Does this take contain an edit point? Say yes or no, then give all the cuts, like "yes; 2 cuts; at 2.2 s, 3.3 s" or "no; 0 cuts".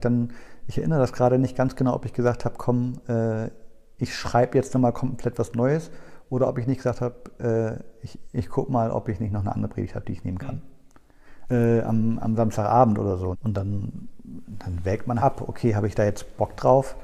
yes; 3 cuts; at 11.5 s, 13.3 s, 15.2 s